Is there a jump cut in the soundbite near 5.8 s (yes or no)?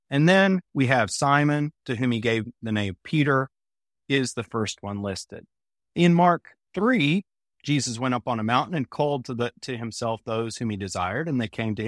yes